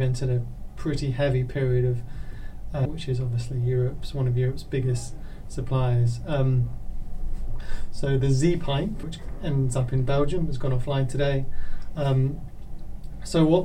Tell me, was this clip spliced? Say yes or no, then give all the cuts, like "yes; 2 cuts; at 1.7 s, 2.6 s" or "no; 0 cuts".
yes; 3 cuts; at 2.9 s, 9.0 s, 12.0 s